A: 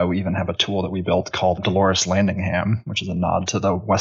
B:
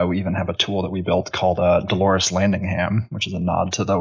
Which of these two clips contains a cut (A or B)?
A